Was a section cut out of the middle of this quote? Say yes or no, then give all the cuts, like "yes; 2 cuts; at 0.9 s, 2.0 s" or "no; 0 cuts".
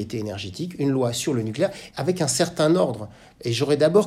yes; 1 cut; at 1.9 s